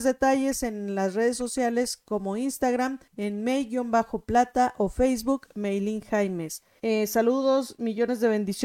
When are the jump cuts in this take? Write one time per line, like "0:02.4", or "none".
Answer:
0:03.1
0:06.8